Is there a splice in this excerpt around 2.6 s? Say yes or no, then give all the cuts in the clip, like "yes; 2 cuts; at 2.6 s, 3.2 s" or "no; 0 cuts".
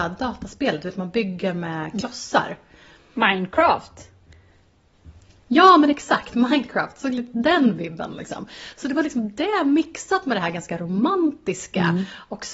no; 0 cuts